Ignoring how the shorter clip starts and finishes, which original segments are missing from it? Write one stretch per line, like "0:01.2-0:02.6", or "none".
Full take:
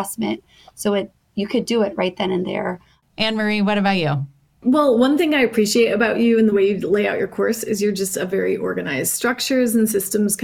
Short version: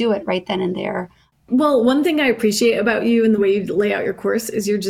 0:03.0-0:04.5